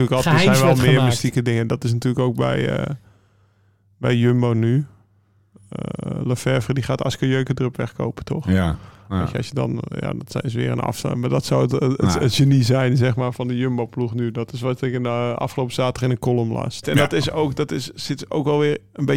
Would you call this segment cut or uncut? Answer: cut